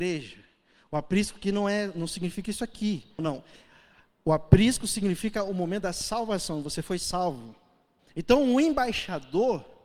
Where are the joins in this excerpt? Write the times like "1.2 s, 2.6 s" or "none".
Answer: 3.2 s, 8.0 s